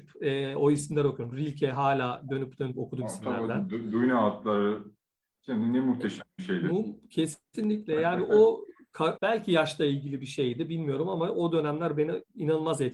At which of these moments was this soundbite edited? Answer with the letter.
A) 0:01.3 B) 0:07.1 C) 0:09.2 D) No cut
C